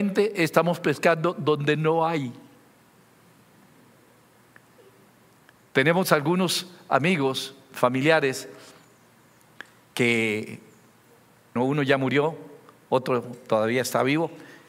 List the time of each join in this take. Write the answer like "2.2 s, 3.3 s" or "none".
11.6 s